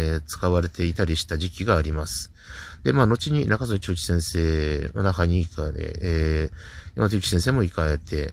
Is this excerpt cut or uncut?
cut